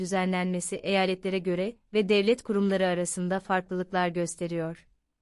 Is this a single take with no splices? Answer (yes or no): yes